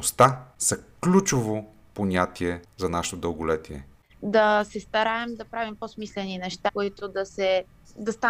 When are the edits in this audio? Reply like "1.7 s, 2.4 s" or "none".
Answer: 4.1 s, 6.7 s